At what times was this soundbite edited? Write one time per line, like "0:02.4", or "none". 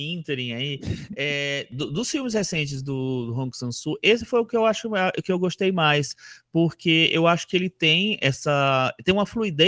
none